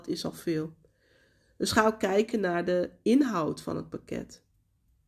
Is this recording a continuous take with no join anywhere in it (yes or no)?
yes